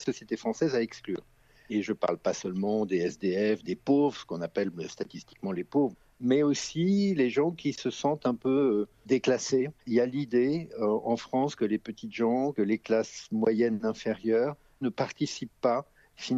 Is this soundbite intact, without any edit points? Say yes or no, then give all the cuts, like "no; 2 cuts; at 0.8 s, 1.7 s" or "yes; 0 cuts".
yes; 0 cuts